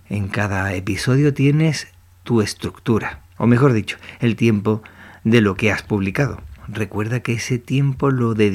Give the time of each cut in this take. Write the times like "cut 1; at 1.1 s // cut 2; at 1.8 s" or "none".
cut 1; at 3.4 s // cut 2; at 6.6 s